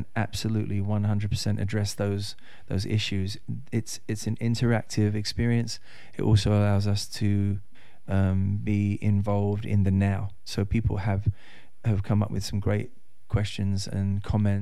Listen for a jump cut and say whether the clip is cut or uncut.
uncut